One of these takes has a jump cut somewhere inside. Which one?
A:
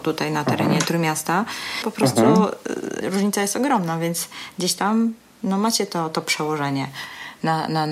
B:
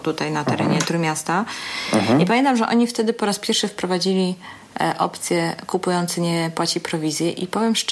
A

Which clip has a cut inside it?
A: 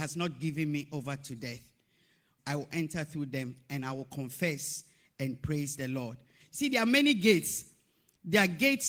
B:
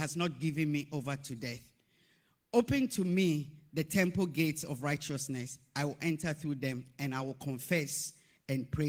A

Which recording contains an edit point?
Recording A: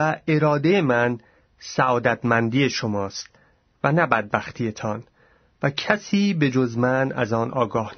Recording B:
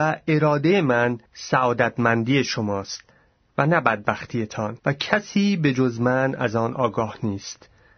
B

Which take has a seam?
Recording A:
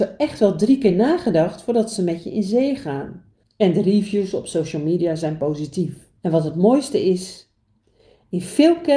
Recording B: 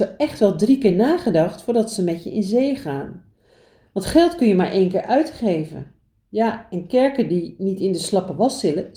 A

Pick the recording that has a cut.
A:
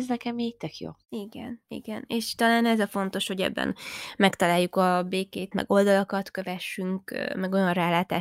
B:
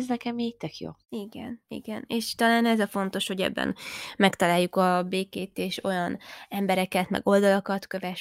A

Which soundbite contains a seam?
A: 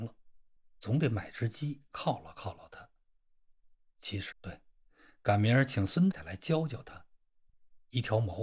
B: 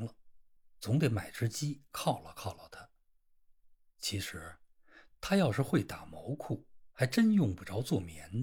A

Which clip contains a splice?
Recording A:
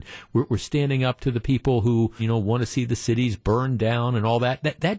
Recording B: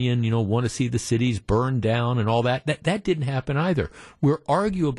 A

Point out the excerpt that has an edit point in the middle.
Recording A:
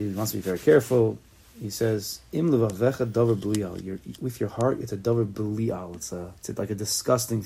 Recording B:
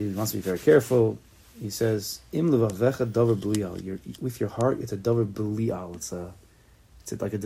A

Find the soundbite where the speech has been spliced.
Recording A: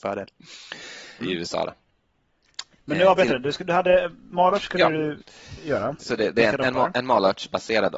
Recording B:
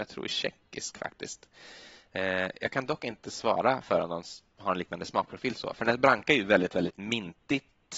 A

